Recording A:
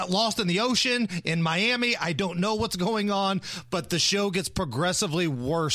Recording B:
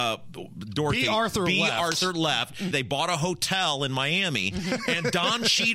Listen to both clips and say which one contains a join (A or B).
B